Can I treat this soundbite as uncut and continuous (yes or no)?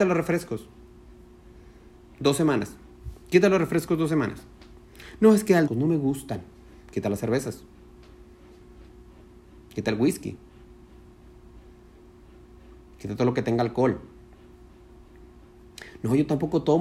no